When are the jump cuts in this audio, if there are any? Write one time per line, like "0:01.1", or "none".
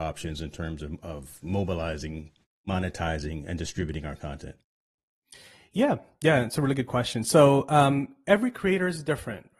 none